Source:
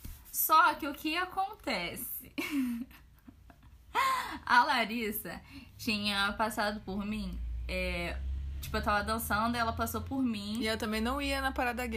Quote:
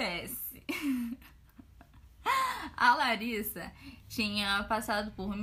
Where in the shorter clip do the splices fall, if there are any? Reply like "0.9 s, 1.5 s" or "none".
none